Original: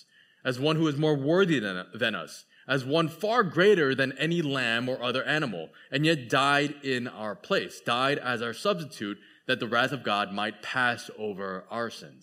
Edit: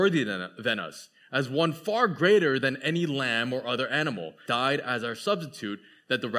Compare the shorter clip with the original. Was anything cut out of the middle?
yes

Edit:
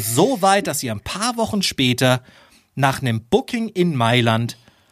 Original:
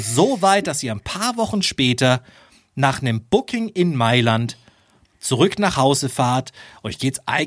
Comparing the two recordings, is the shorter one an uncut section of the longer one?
yes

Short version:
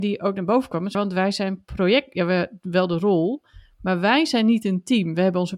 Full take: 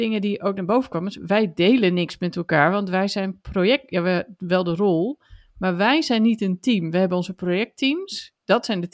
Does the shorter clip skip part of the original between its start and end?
yes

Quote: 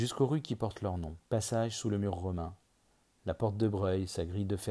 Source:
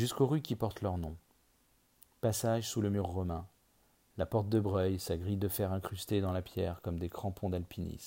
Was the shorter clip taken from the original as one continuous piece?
no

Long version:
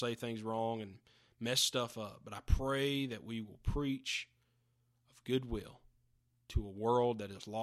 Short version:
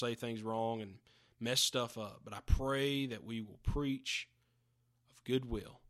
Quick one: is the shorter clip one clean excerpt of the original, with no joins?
yes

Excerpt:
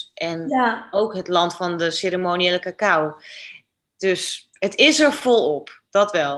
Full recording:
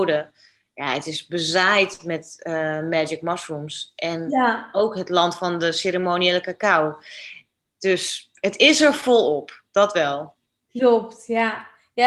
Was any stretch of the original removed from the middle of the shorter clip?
no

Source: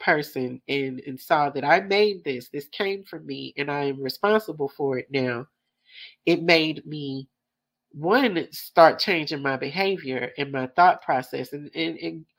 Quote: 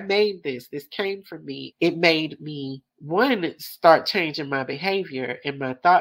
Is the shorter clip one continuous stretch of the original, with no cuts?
no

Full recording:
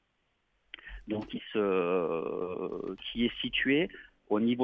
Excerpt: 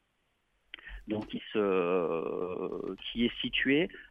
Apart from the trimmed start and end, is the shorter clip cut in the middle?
no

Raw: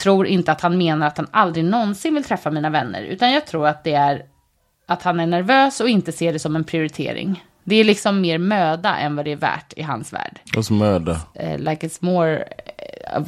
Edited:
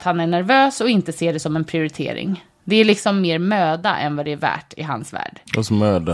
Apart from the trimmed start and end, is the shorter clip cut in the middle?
no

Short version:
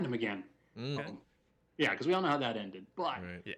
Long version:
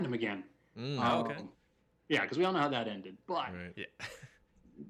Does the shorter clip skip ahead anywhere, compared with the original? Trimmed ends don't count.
yes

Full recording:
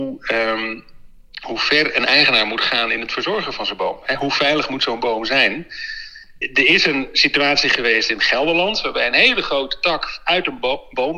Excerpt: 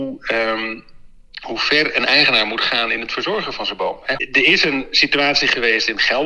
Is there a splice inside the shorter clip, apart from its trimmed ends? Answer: yes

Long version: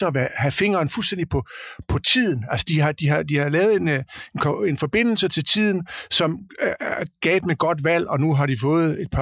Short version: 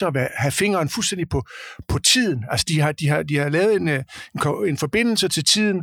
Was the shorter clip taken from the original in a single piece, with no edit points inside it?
yes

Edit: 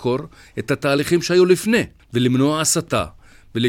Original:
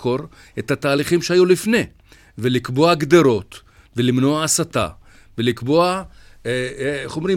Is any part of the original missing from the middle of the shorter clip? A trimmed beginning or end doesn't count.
yes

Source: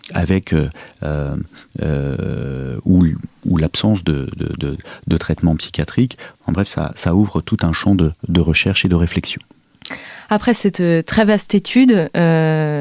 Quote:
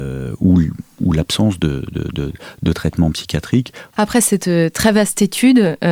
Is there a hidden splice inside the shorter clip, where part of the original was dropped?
yes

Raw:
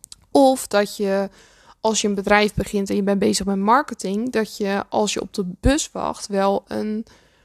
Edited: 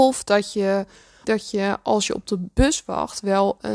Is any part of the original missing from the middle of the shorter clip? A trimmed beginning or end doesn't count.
yes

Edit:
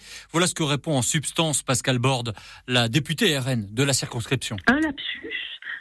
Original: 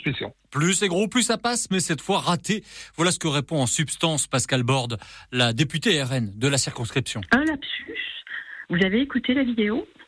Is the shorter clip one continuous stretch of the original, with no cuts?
yes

